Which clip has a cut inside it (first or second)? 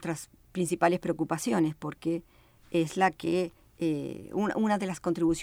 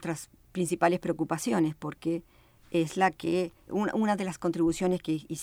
second